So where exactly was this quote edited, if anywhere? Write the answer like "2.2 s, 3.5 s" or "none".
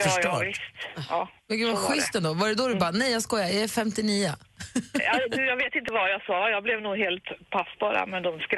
1.4 s

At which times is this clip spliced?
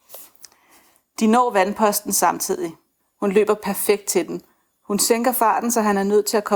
3.0 s, 4.8 s

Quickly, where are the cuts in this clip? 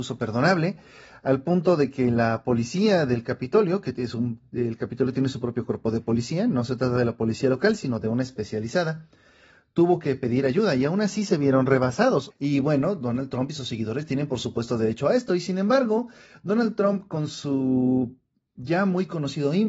12.3 s

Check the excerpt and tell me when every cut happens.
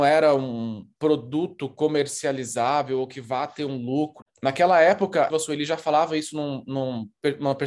4.2 s, 5.3 s

